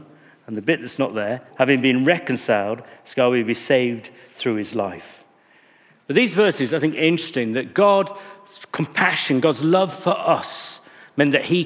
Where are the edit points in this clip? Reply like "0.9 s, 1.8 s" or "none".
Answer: 1.5 s